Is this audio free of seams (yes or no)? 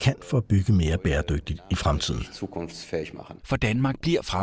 no